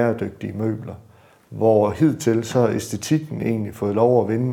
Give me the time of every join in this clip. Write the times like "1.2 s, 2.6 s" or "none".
none